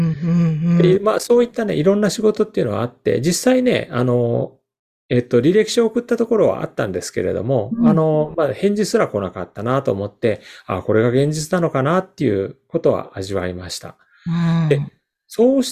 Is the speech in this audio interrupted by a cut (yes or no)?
no